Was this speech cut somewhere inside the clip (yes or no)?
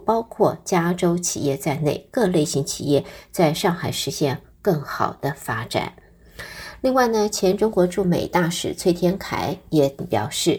no